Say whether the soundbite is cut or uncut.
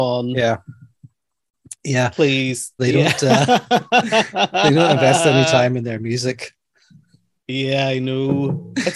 cut